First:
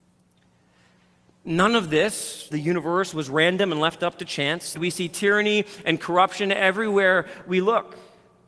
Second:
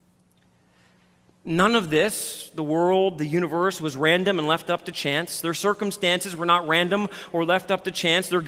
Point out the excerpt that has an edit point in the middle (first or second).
first